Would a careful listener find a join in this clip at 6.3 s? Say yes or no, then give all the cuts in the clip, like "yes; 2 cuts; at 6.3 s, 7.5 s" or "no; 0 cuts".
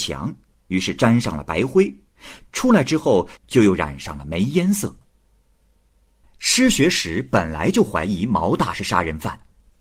no; 1 cut; at 3.4 s